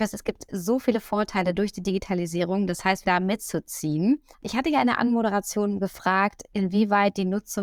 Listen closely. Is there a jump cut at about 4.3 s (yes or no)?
yes